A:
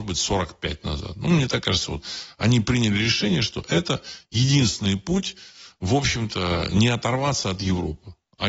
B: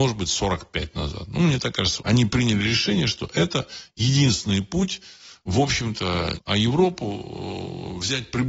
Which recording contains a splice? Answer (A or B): B